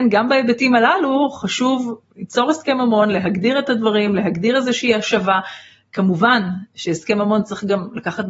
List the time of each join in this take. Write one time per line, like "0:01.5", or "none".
none